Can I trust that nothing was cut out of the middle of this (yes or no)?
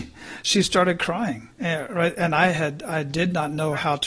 no